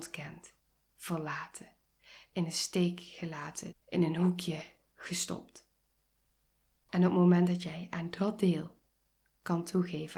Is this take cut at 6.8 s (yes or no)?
no